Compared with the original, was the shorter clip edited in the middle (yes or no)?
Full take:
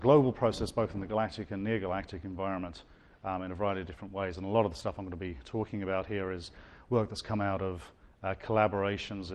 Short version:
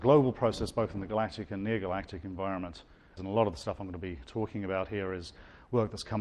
yes